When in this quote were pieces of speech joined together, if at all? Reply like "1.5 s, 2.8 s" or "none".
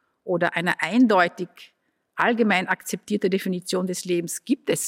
none